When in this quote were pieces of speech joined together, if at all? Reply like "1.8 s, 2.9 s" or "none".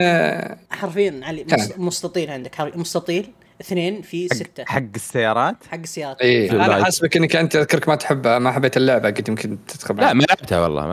6.5 s